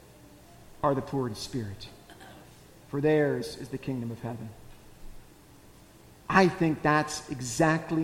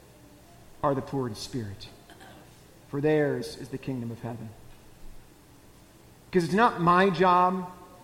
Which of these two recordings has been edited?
second; 1 cut; at 6.2 s

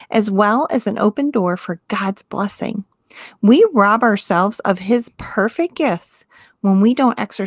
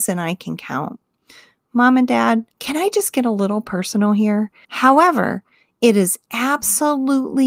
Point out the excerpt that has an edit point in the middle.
second; 2 cuts; at 2.5 s, 4.6 s

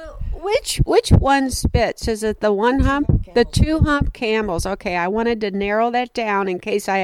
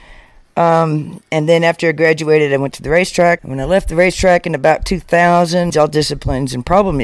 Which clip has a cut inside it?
second; 2 cuts; at 3.4 s, 5.7 s

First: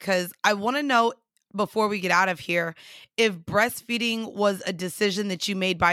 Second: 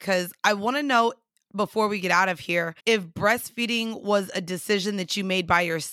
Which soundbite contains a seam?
second; 1 cut; at 2.8 s

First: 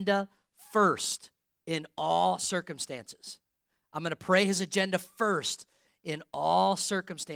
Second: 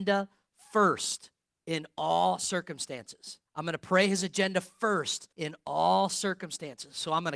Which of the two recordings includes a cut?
second; 2 cuts; at 3.5 s, 5.3 s

